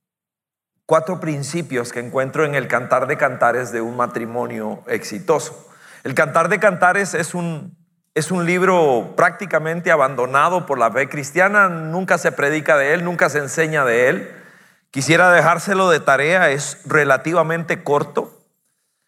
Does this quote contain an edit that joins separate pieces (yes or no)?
no